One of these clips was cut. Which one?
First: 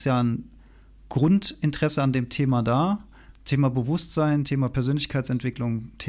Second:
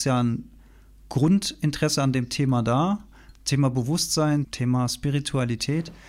second; 1 cut; at 4.4 s

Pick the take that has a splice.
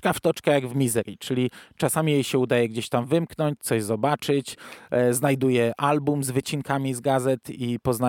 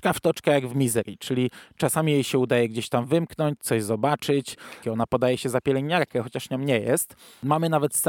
second; 1 cut; at 4.8 s

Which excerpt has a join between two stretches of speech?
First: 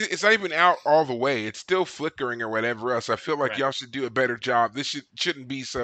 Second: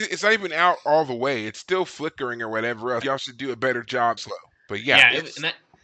second; 2 cuts; at 3.0 s, 4.2 s

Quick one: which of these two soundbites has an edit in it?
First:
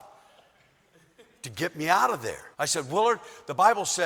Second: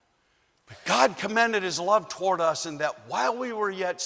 first; 1 cut; at 2.5 s

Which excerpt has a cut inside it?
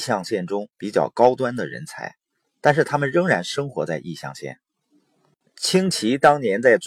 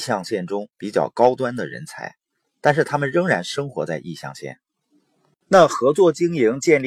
second; 1 cut; at 5.4 s

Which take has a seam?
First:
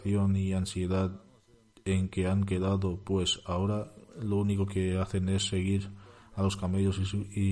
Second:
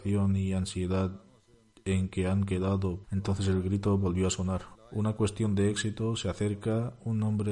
second; 2 cuts; at 3.0 s, 4.7 s

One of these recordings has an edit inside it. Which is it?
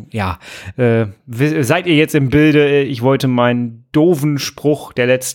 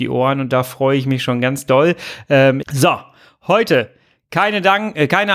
second; 1 cut; at 2.6 s

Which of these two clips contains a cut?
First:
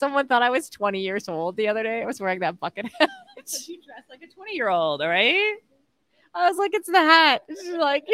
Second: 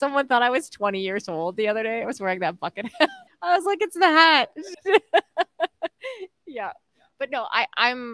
second; 2 cuts; at 3.3 s, 4.7 s

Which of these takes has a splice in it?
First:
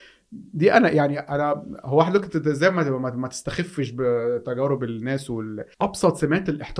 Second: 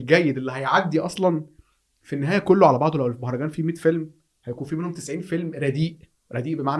first; 1 cut; at 5.7 s

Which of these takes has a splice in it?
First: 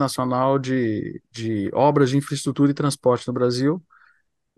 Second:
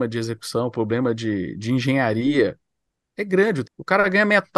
second; 1 cut; at 3.6 s

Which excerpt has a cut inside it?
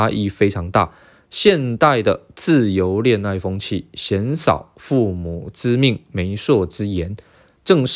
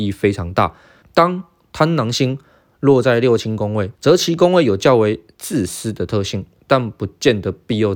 second; 3 cuts; at 1.0 s, 3.9 s, 6.6 s

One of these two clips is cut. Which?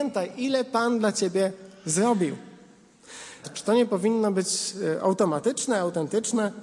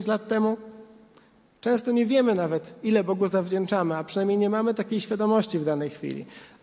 first; 1 cut; at 3.4 s

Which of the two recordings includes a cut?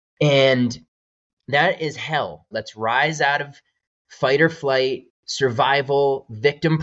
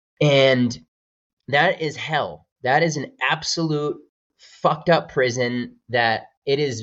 first; 1 cut; at 2.5 s

